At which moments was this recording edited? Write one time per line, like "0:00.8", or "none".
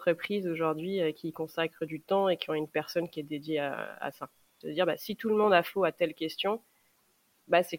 0:04.6

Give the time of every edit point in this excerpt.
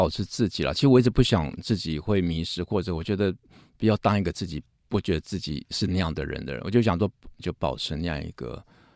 0:07.4

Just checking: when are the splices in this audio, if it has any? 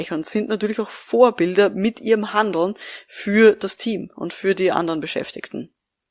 none

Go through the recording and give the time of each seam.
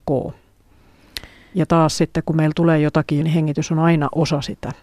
0:03.2

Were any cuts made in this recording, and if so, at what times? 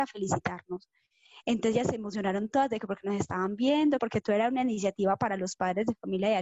0:04.0

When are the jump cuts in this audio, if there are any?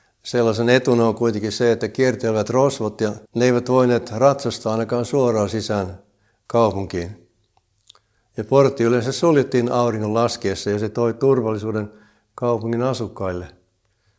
0:03.3

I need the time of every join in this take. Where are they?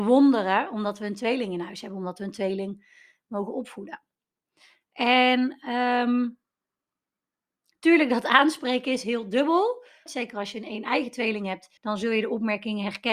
0:10.1
0:11.8

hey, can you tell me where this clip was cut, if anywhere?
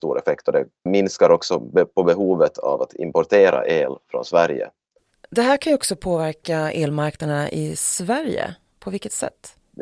none

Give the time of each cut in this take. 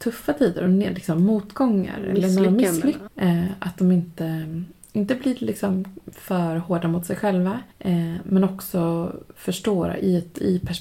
0:03.1
0:07.7

